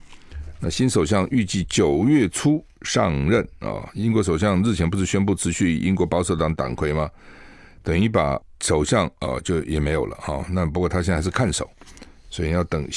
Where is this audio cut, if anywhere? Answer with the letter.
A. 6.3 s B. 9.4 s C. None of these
C